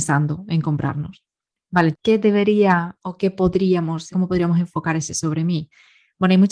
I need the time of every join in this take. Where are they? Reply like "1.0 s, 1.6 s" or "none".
1.9 s, 4.1 s